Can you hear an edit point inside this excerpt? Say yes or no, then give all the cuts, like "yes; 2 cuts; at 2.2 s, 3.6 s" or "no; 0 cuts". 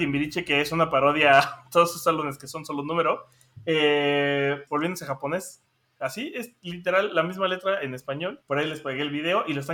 yes; 2 cuts; at 4.7 s, 8.4 s